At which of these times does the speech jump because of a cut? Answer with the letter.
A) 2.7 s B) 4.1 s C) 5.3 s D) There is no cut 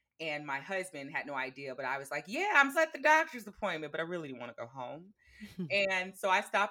A